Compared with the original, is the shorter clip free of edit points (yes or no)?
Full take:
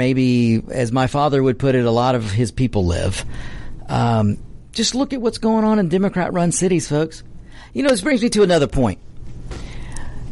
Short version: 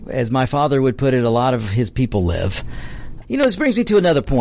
no